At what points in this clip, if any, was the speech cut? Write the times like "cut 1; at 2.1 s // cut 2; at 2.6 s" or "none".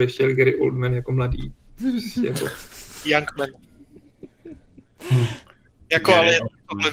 none